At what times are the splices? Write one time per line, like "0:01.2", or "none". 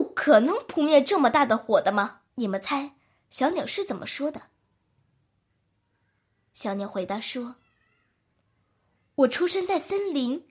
0:02.3